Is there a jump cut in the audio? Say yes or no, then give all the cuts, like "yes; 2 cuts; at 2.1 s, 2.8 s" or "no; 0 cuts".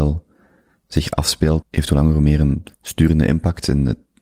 yes; 2 cuts; at 1.6 s, 2.7 s